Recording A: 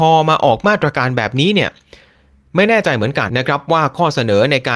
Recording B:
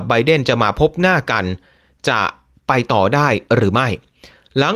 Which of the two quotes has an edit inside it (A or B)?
A